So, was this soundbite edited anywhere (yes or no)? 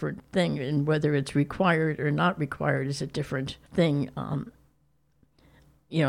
yes